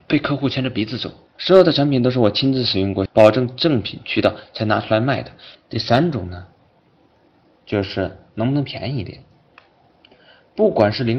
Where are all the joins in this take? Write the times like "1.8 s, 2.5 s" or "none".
1.4 s, 3.1 s, 5.5 s